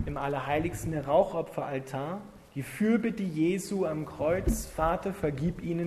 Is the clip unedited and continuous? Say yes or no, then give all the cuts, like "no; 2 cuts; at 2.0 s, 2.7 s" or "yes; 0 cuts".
yes; 0 cuts